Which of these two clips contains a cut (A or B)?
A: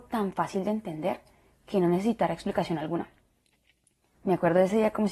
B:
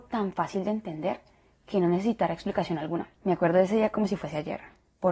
B